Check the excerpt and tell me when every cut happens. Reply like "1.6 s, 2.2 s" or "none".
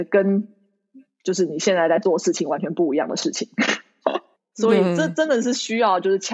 4.4 s